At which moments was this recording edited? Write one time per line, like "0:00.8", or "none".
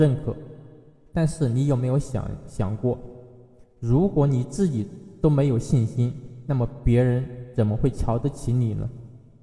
none